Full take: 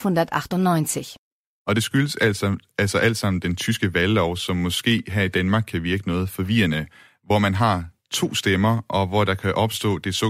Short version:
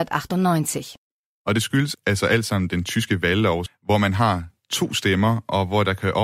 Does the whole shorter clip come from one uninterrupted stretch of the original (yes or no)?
no